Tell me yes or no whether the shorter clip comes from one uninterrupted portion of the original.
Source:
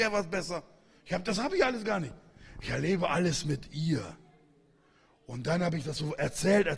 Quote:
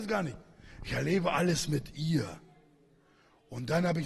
yes